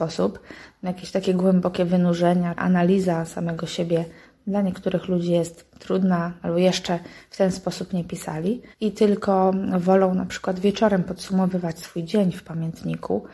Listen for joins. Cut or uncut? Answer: cut